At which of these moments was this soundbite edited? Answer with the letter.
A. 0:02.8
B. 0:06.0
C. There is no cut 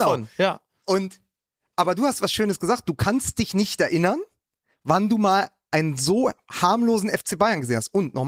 C